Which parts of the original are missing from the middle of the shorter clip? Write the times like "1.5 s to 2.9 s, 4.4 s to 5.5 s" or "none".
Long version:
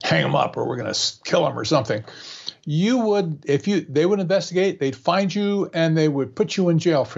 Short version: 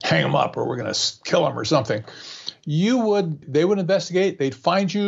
3.4 s to 3.8 s